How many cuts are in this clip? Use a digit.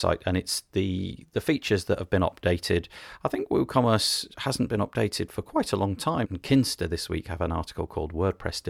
1